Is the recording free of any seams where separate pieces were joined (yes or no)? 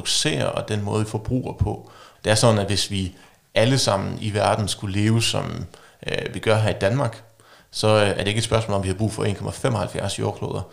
no